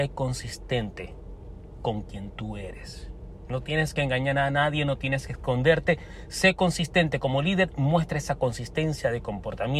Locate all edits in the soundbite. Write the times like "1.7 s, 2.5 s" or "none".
none